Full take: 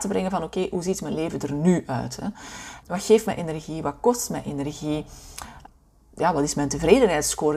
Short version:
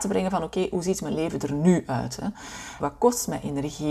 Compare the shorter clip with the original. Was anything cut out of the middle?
yes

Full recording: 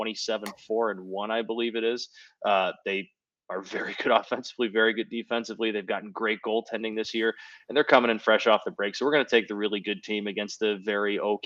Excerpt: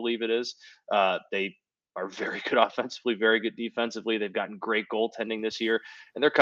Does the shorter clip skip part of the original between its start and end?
no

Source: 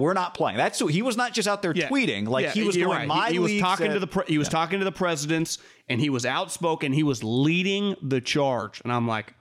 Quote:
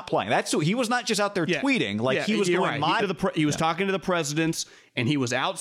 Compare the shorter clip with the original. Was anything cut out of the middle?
yes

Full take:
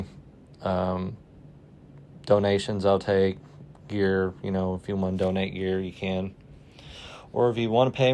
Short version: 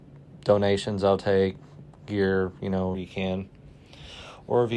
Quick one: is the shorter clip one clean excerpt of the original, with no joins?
no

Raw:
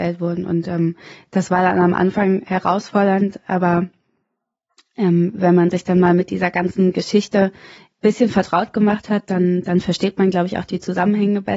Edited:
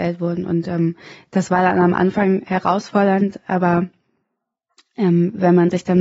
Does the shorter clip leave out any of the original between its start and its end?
no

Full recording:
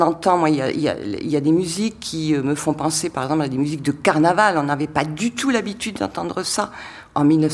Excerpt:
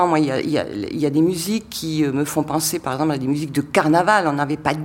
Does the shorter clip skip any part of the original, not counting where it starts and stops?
no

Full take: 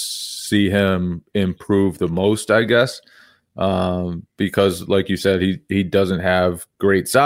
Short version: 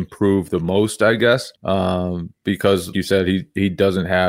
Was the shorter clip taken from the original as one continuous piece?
no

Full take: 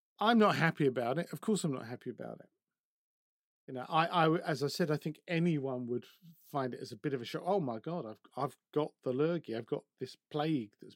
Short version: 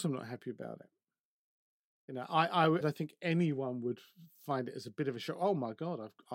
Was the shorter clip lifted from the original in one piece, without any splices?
no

